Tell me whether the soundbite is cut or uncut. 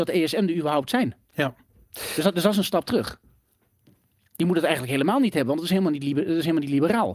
uncut